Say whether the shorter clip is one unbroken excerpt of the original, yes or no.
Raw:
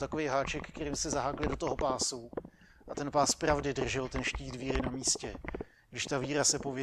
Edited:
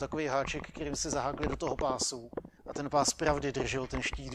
no